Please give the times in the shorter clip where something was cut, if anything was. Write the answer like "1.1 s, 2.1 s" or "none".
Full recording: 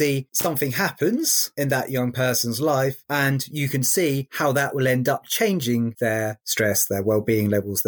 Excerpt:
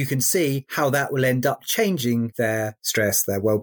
none